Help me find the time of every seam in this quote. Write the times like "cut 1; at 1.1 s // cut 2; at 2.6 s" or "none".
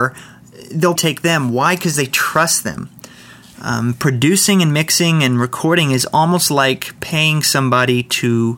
cut 1; at 1.0 s